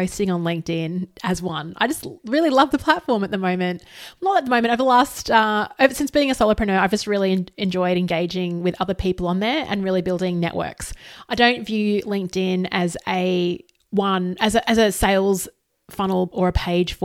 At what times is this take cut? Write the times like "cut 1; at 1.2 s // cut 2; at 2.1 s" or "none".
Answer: none